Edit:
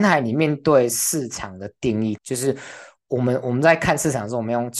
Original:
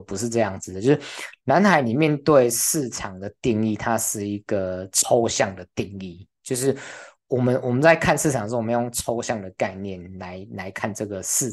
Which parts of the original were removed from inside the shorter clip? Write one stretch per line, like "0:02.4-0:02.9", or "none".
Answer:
0:03.8-0:06.4